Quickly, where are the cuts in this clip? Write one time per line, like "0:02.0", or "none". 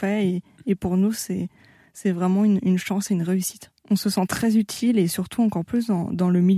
0:03.8